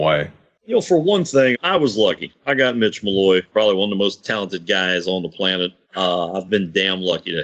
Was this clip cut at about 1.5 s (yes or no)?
yes